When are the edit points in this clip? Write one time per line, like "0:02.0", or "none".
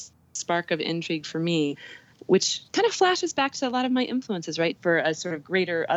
0:04.8